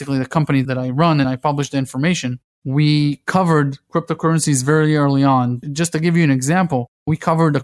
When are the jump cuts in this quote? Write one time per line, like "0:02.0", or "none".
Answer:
none

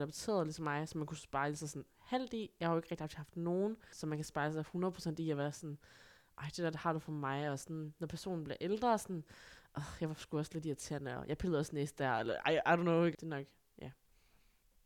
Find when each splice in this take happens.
0:03.9
0:13.1

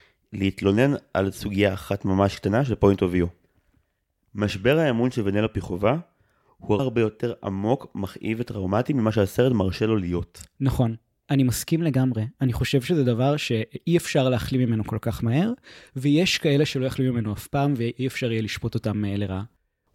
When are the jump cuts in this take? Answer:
0:06.8

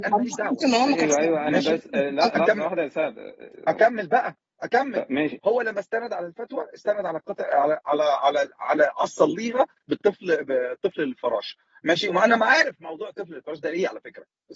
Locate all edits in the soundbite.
0:05.4

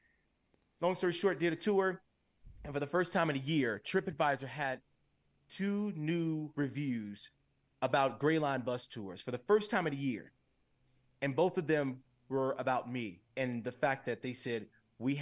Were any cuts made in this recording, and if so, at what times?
0:13.3

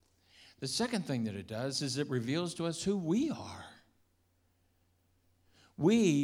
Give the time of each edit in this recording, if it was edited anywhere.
none

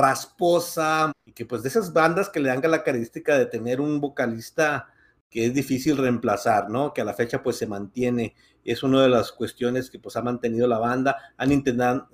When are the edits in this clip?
0:01.1

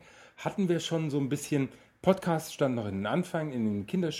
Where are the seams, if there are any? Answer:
none

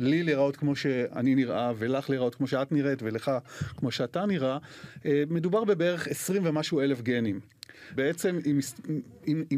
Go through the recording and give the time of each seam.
0:07.9

